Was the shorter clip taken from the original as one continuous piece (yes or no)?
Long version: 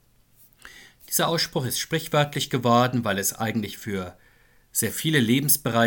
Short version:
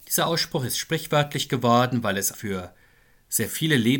no